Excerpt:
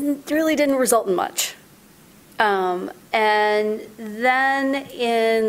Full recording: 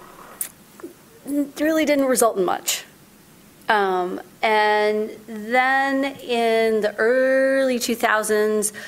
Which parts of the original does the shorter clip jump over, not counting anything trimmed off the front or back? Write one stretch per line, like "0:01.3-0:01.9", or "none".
none